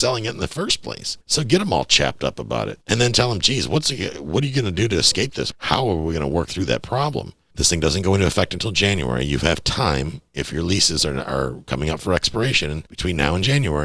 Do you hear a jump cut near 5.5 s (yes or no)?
yes